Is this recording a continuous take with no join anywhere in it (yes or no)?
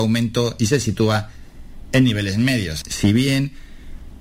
no